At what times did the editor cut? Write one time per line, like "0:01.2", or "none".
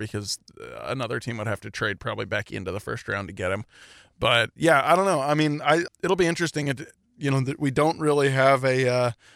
0:05.9